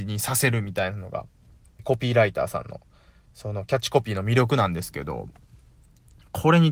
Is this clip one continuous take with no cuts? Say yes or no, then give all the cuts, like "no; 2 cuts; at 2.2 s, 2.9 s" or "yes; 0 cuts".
no; 1 cut; at 1.8 s